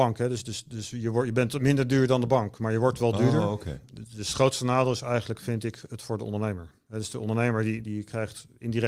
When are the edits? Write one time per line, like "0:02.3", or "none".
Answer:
0:07.8